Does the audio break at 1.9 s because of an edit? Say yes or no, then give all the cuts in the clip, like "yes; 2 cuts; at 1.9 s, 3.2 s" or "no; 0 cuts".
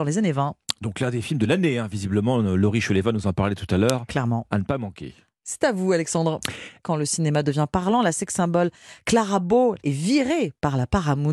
no; 2 cuts; at 6.8 s, 9.8 s